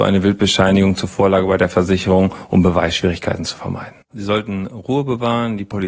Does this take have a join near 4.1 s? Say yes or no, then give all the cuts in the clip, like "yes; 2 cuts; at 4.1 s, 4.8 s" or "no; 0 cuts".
yes; 1 cut; at 4.1 s